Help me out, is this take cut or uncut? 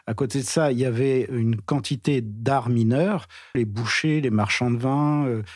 cut